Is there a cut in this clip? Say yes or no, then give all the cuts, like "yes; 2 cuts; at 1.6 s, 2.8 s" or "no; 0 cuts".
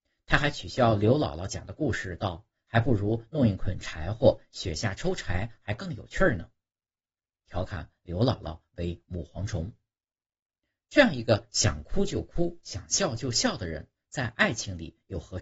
yes; 1 cut; at 7.2 s